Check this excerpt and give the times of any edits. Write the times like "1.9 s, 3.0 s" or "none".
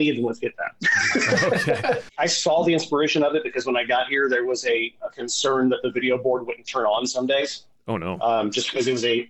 2.1 s